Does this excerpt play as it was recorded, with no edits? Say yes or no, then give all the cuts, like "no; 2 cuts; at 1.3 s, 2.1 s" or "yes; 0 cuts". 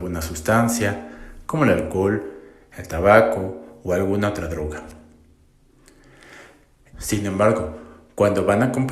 no; 1 cut; at 6.9 s